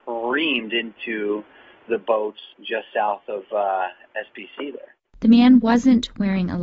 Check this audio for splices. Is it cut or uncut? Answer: cut